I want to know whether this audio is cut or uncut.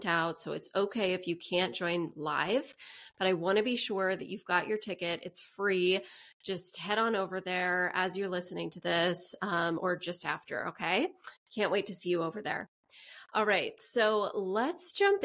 uncut